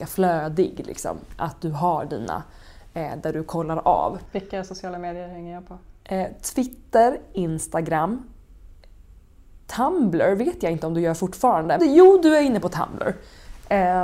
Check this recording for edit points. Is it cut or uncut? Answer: cut